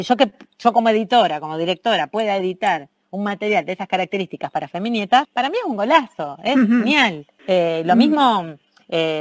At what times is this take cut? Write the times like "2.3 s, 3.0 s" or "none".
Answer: none